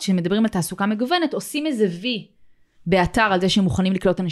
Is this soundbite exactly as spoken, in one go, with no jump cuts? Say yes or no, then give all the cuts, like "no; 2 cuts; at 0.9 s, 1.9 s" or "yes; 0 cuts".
yes; 0 cuts